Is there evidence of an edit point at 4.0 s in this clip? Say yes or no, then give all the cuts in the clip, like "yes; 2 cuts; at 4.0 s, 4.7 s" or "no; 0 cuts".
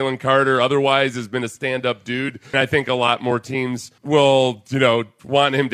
yes; 2 cuts; at 2.5 s, 4.0 s